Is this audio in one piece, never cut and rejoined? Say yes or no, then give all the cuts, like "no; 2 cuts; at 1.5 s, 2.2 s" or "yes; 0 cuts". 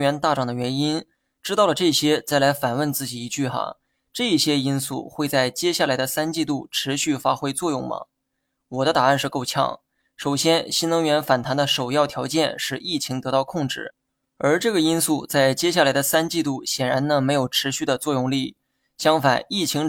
yes; 0 cuts